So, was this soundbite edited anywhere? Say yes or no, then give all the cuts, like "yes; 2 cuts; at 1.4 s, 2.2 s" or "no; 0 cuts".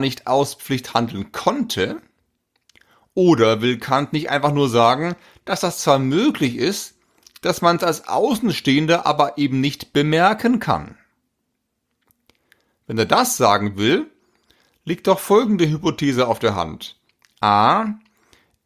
no; 0 cuts